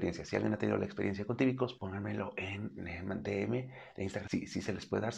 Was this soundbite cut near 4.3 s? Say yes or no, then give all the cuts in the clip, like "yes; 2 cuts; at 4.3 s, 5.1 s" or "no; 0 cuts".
yes; 2 cuts; at 1.8 s, 4.3 s